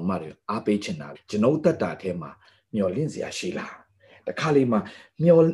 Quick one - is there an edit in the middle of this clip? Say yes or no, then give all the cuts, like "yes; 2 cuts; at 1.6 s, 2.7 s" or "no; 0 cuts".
yes; 1 cut; at 1.1 s